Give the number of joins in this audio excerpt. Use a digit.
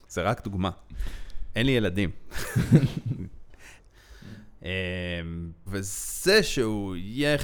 2